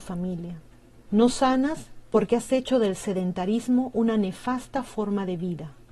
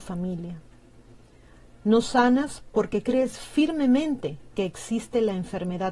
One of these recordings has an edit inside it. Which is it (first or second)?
first